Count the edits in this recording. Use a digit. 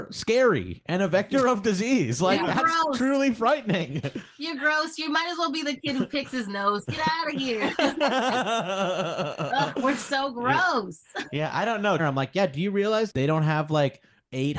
2